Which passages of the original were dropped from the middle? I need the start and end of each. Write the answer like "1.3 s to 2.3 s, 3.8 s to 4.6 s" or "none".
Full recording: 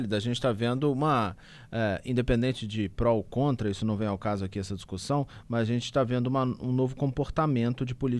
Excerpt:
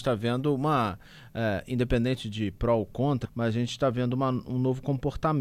3.6 s to 5.4 s